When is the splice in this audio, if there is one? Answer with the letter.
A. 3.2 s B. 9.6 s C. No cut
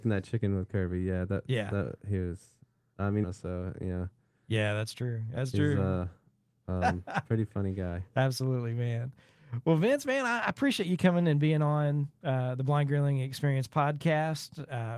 A